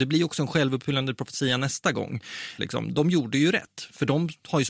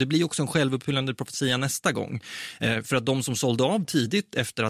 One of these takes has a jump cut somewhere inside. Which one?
first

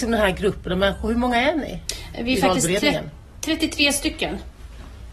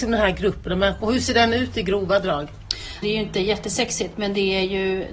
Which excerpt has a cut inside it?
second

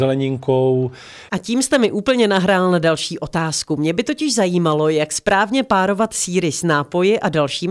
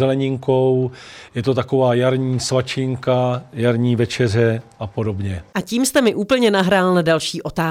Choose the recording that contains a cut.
first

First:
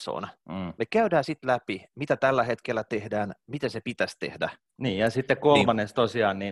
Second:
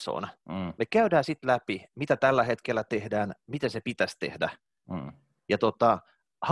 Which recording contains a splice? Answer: first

